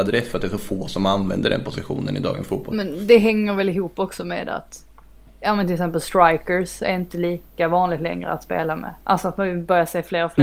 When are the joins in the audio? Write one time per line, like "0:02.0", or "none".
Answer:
none

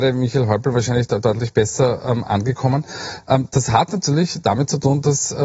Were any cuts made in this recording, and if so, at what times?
none

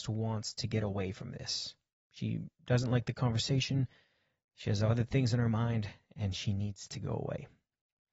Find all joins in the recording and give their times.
none

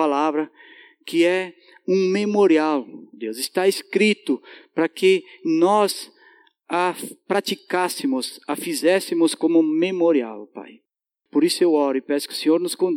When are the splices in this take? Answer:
none

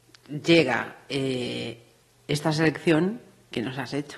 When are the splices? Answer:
none

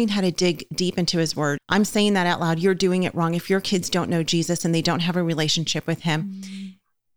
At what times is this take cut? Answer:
0:01.6

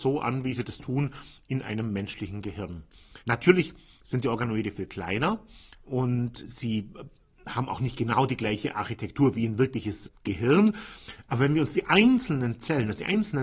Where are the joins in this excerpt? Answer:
0:03.2

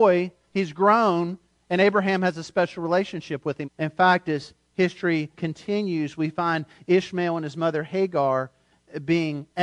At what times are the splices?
0:03.6
0:05.3

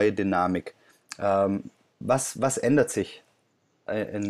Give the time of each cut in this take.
none

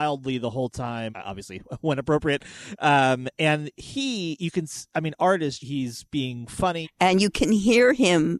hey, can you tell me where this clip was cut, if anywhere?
0:01.1
0:05.6
0:06.8

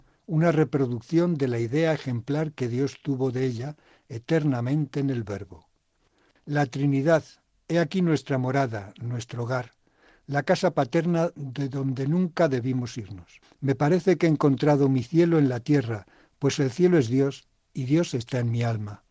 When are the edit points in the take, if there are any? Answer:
none

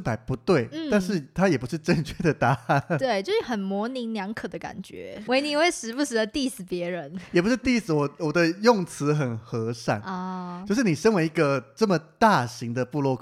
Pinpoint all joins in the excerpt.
0:05.3

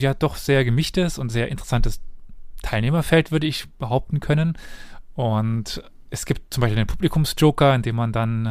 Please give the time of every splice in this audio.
none

